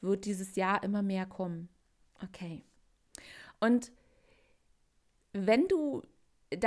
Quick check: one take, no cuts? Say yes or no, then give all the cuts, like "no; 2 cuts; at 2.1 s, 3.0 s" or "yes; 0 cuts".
no; 1 cut; at 2.1 s